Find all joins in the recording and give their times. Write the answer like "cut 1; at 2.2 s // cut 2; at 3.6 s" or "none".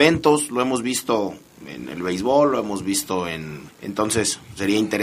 cut 1; at 3.7 s